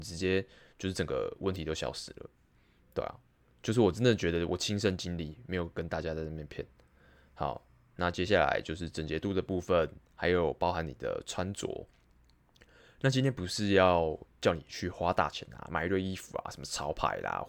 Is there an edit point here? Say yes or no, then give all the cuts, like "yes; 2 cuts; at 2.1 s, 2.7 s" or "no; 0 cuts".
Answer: no; 0 cuts